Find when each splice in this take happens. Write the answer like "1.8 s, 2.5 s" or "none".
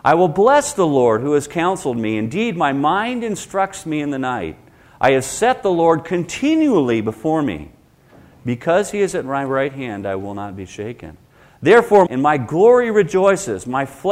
12.1 s